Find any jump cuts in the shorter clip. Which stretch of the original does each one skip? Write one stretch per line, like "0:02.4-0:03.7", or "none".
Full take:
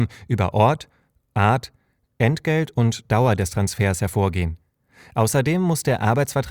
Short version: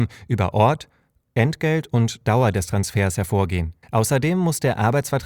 0:01.2-0:02.1
0:04.7-0:05.1